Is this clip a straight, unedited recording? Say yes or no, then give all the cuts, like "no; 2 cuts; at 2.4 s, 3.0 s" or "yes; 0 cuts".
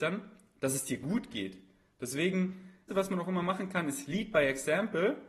no; 1 cut; at 2.9 s